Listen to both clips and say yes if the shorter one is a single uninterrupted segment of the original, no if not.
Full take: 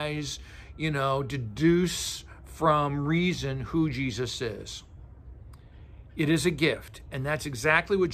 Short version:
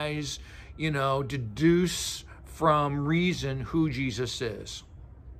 yes